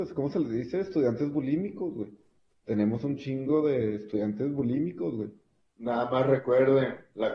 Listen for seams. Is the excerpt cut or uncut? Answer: cut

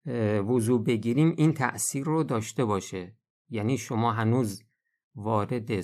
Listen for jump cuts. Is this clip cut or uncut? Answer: uncut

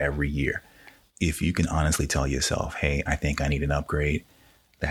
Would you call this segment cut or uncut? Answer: cut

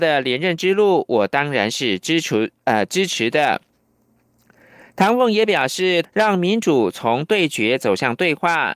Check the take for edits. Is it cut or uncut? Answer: cut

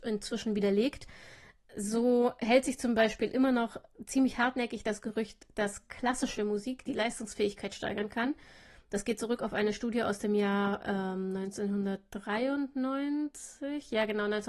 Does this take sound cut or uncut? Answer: uncut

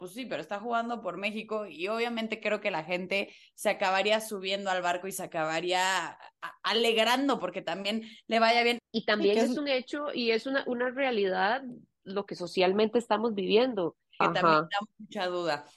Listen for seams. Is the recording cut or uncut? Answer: cut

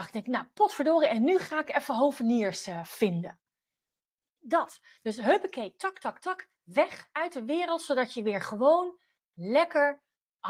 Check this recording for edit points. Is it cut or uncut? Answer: uncut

